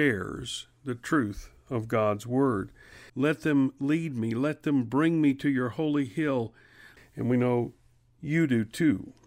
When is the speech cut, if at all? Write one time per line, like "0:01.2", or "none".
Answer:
0:03.1
0:07.0